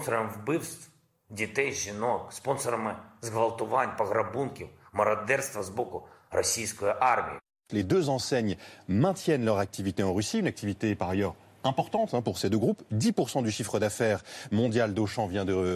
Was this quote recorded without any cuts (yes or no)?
no